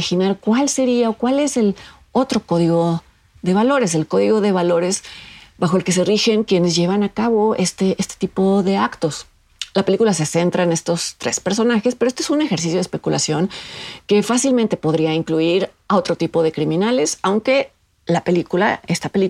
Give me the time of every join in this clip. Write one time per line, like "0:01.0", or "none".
none